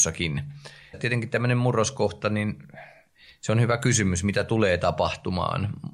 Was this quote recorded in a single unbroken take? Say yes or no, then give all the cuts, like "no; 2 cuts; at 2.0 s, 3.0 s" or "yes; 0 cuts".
no; 1 cut; at 0.9 s